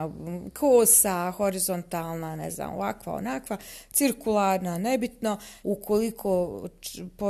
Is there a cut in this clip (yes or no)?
yes